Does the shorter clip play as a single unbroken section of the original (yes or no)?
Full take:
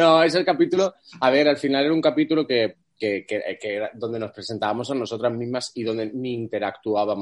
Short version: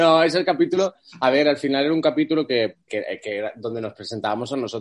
no